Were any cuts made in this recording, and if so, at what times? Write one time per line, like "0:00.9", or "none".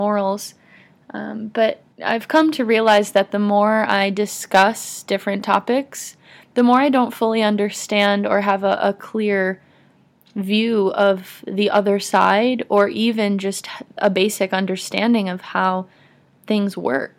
0:01.9